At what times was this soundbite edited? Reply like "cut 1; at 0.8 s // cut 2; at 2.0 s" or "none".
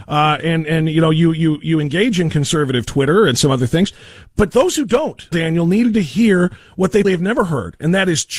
cut 1; at 5.3 s // cut 2; at 7.0 s

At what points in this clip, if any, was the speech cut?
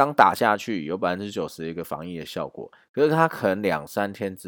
none

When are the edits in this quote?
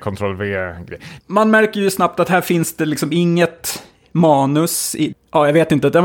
cut 1; at 1.2 s // cut 2; at 5.1 s

